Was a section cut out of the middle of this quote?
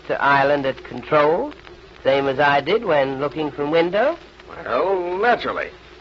no; 0 cuts

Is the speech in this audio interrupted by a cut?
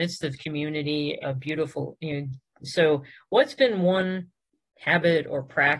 yes; 2 cuts; at 1.2 s, 2.6 s

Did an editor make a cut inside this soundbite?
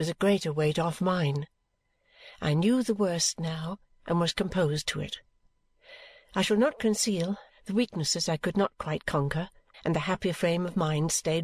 yes; 2 cuts; at 7.5 s, 9.7 s

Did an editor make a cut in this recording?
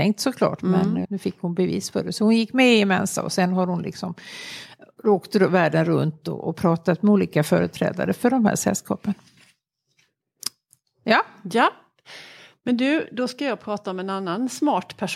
yes; 1 cut; at 1.0 s

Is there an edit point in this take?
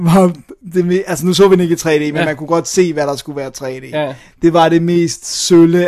no; 0 cuts

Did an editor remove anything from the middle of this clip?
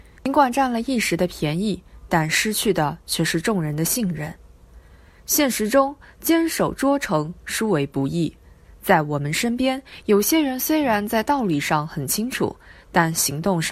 no; 0 cuts

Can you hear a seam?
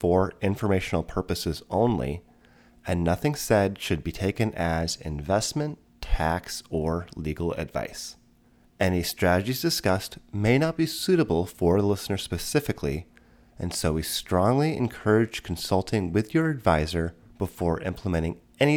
no; 0 cuts

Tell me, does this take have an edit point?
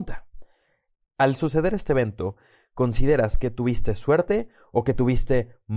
no; 0 cuts

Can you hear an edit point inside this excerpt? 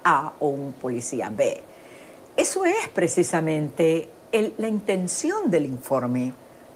no; 0 cuts

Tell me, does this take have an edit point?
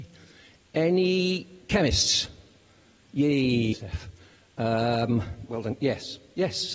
yes; 2 cuts; at 3.7 s, 5.5 s

